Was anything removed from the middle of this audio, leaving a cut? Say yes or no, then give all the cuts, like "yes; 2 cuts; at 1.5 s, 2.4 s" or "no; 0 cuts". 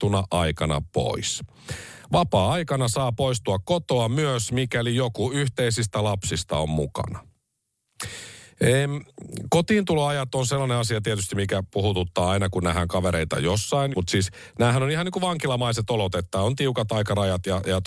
yes; 1 cut; at 13.9 s